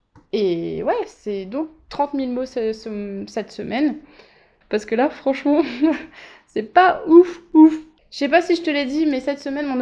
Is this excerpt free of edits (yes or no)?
no